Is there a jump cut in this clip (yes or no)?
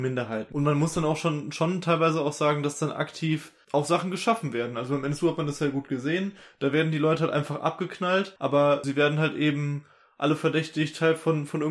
no